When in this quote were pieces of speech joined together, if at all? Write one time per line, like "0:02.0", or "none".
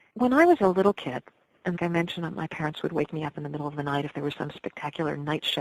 0:01.8